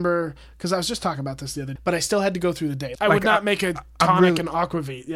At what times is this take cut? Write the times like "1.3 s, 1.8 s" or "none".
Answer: 1.8 s, 3.0 s